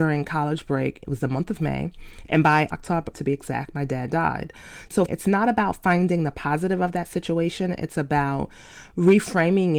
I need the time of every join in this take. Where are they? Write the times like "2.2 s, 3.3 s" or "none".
3.1 s, 4.9 s

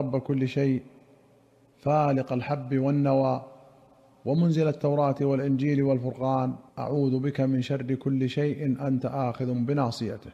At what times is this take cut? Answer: 6.7 s

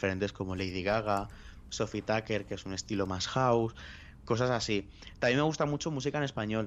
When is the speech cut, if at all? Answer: none

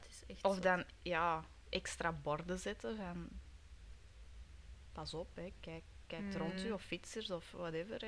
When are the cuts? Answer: none

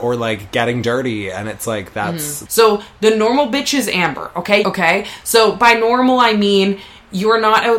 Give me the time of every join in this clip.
2.4 s, 4.6 s

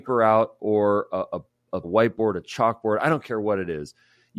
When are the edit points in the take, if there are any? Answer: 1.8 s

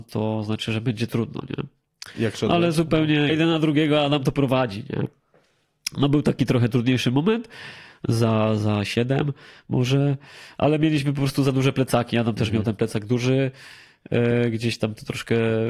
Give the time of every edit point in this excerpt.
3.3 s

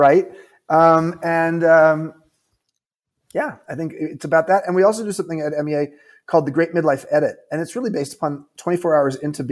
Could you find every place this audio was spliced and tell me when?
none

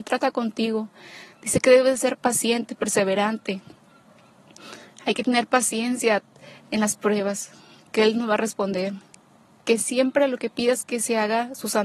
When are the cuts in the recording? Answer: none

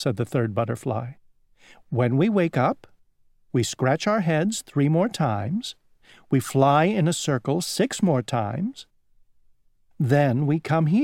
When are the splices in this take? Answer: none

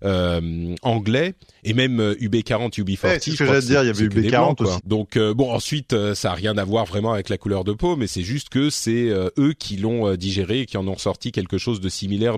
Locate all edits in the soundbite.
4.8 s

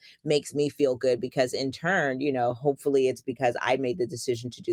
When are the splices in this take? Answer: none

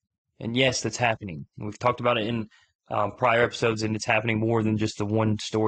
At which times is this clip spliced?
none

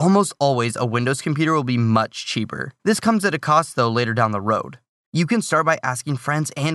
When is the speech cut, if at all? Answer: 2.8 s, 5.0 s

